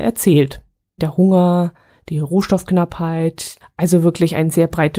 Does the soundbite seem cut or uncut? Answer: cut